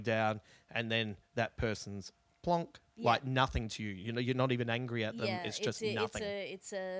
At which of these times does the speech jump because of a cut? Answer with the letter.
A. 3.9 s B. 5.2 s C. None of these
C